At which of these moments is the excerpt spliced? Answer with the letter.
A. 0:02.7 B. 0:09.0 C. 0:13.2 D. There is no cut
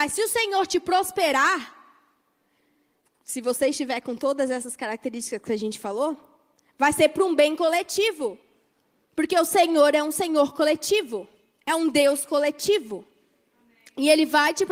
D